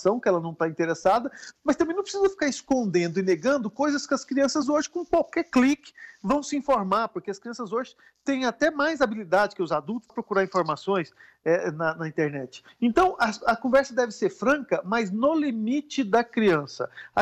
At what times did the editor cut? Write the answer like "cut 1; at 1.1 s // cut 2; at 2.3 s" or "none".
none